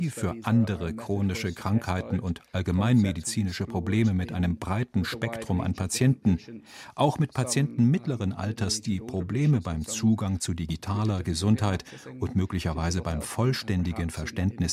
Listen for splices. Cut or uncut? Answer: uncut